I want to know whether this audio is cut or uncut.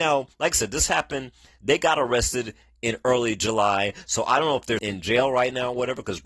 cut